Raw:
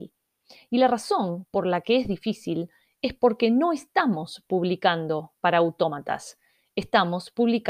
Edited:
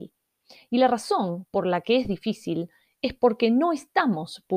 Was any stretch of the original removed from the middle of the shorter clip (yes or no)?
no